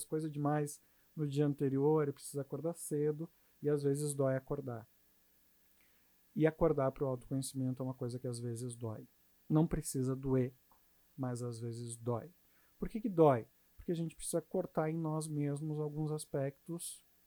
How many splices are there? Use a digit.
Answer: 0